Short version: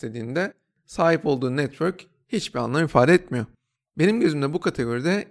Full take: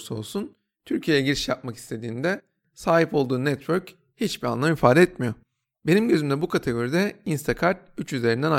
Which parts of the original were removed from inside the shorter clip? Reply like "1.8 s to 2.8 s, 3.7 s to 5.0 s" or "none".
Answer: none